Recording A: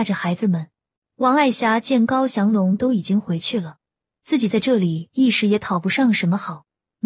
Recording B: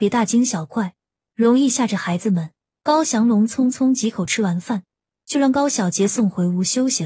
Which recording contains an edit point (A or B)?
A